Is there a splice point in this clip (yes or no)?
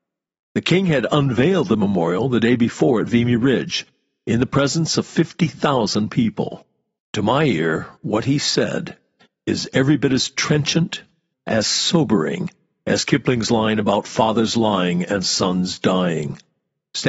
yes